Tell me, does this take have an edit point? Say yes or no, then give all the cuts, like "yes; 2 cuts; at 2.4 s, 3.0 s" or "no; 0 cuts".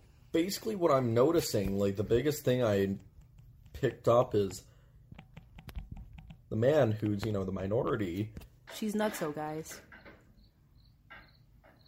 yes; 1 cut; at 8.7 s